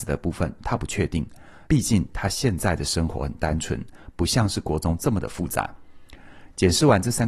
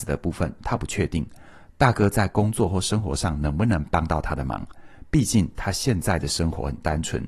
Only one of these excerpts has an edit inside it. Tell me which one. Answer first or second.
first